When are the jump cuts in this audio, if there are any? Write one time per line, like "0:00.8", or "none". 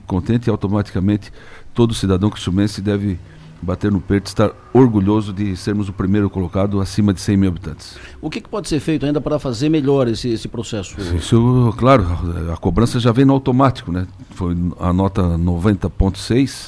none

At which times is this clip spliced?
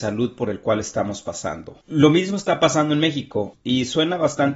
0:01.8
0:03.5

